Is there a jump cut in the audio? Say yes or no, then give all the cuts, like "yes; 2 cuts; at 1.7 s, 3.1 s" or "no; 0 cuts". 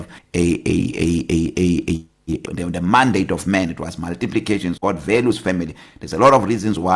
yes; 2 cuts; at 2.4 s, 4.8 s